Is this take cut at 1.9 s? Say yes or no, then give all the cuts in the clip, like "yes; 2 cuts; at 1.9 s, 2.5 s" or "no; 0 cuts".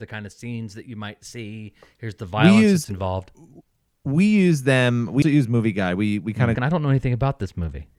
no; 2 cuts; at 5.2 s, 6.5 s